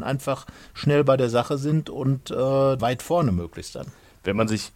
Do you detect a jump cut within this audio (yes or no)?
yes